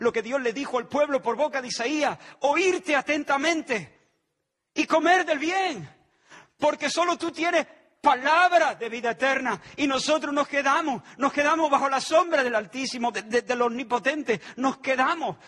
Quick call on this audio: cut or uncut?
uncut